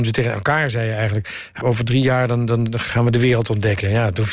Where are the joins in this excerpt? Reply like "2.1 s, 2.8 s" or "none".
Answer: 1.6 s, 2.9 s